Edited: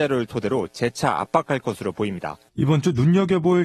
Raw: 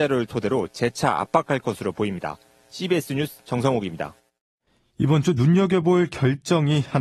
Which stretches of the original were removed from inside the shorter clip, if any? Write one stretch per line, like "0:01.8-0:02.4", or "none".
0:02.5-0:04.9